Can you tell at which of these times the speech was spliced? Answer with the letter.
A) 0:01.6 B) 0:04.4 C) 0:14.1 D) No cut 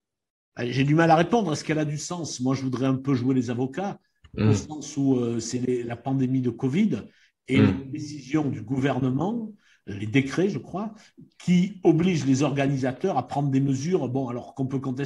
D